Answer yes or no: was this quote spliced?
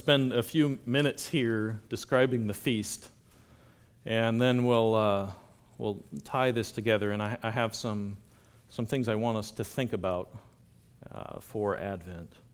no